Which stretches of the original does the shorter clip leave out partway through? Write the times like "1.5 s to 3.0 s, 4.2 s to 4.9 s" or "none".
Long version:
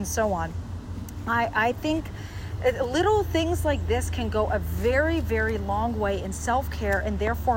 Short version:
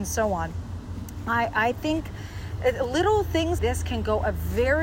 3.6 s to 3.8 s